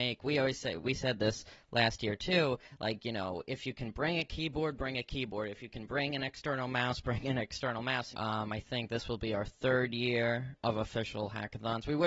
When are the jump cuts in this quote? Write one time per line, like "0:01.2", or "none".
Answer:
0:08.1
0:10.6